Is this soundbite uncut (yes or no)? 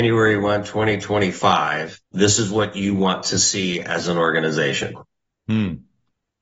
no